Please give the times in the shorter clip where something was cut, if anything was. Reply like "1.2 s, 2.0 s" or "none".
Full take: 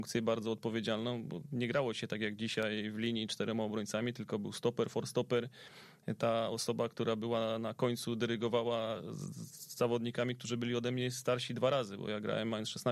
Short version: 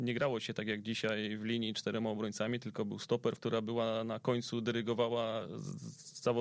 3.4 s